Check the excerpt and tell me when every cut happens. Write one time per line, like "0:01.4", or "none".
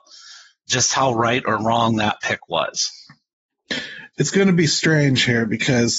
none